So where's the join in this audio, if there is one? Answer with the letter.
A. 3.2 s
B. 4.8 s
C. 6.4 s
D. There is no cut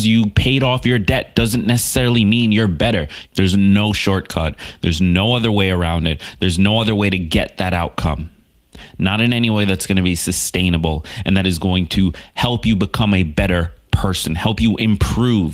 A